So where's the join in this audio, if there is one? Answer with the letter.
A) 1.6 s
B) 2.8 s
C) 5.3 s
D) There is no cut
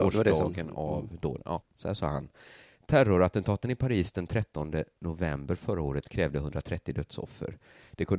A